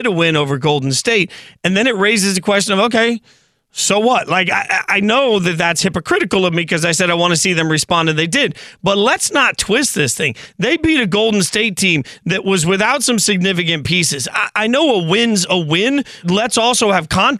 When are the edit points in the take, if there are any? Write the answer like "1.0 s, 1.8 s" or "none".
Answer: 16.2 s